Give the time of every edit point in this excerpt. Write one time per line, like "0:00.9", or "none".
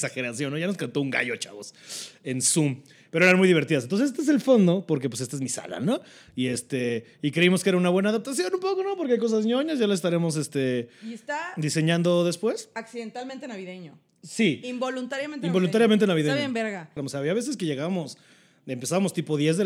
0:17.0